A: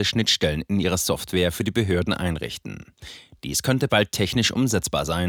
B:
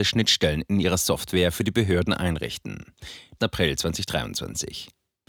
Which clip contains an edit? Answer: B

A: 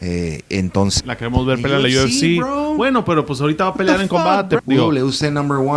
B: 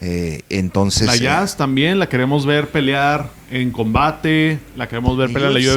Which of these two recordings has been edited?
A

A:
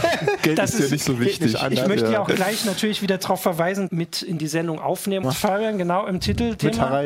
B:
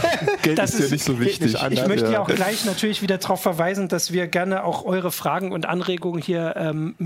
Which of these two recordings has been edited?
A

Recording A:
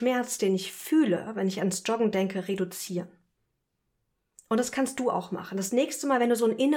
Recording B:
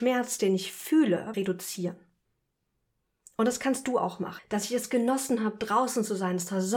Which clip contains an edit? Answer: B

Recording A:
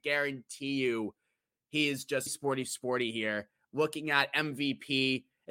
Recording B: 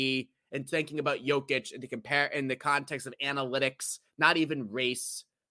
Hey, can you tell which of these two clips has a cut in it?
A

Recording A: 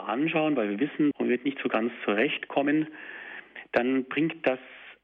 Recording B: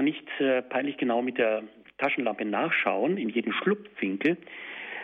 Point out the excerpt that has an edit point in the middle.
A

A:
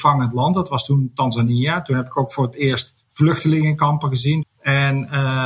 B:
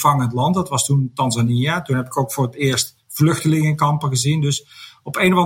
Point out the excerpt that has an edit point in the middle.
A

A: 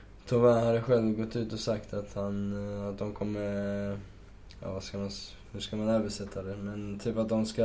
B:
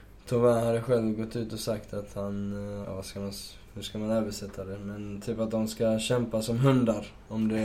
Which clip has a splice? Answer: B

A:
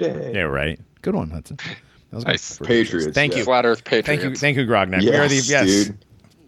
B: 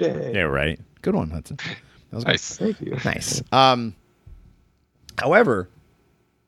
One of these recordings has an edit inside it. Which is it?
A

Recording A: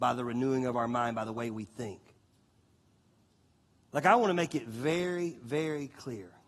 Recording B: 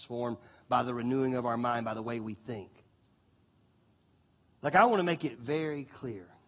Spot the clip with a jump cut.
B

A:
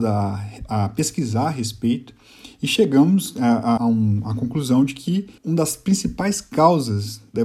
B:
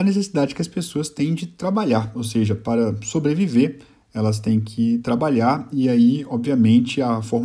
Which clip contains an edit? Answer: A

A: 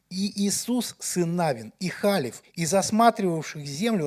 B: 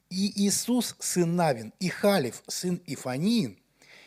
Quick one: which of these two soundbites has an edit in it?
A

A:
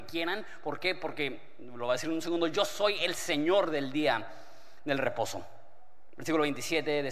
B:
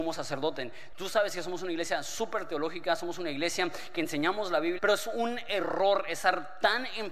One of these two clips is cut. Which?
B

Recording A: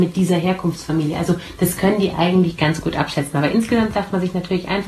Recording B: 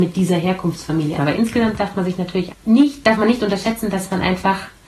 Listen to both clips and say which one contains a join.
B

